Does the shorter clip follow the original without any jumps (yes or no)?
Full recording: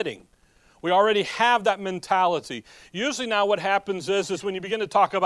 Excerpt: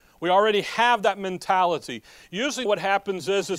no